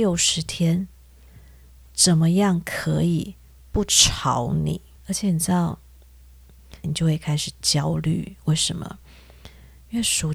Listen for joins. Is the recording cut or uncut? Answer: cut